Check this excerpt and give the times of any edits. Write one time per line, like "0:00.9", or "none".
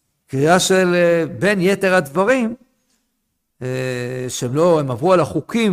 none